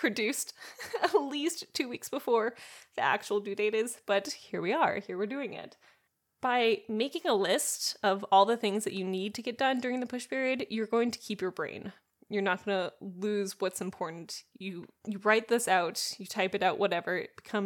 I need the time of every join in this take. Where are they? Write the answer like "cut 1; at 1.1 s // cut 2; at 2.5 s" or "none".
none